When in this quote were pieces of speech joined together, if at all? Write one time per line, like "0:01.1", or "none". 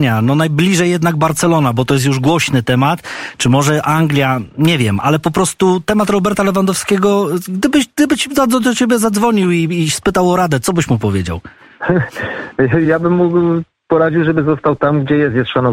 none